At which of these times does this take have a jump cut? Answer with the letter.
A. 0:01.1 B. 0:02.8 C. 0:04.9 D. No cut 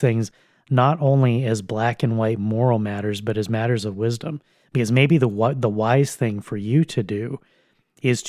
D